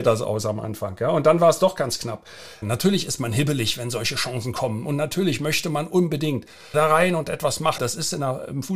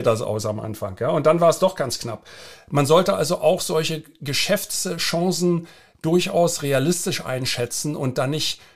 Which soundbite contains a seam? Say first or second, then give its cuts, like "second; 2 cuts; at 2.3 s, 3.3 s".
first; 3 cuts; at 2.6 s, 6.7 s, 7.8 s